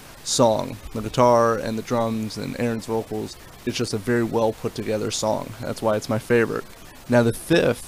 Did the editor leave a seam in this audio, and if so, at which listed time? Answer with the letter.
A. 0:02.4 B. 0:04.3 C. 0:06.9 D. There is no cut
D